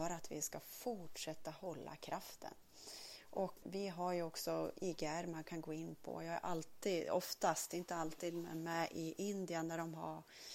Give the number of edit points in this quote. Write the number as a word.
one